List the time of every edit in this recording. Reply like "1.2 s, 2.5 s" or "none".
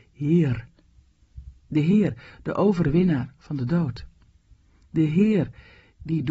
1.6 s